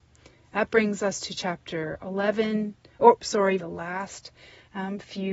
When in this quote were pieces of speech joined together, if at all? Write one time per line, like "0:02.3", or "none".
0:03.6